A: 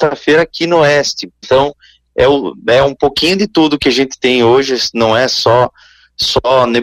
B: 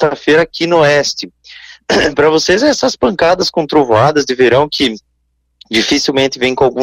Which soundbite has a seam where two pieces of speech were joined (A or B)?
A